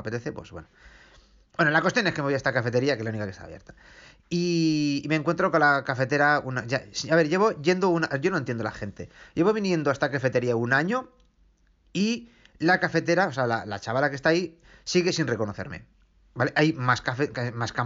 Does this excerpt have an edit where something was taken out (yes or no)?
no